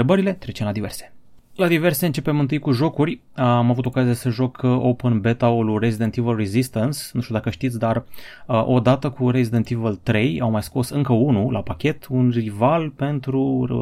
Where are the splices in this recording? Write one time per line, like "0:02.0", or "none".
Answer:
none